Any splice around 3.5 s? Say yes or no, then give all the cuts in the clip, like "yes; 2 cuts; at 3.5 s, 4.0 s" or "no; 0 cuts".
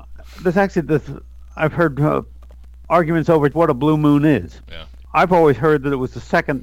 yes; 1 cut; at 3.5 s